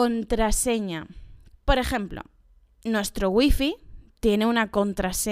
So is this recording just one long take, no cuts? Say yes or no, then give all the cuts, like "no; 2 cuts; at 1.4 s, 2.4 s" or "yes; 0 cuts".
no; 1 cut; at 1.5 s